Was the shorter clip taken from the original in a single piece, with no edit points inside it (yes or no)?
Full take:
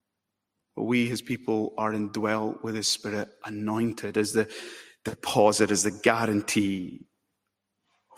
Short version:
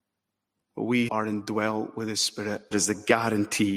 no